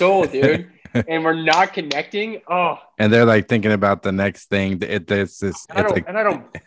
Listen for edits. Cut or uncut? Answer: cut